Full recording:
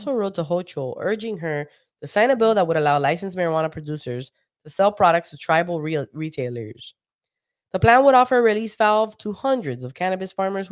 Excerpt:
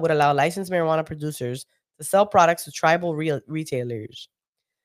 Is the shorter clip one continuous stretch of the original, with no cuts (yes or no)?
yes